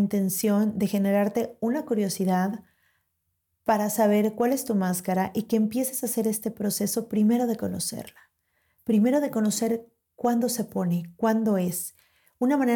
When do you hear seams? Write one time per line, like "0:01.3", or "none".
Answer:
none